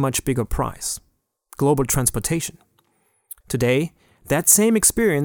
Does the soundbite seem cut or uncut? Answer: cut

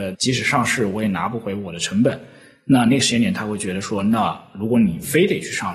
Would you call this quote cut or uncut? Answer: uncut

